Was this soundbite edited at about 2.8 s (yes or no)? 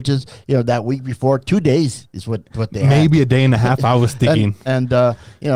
no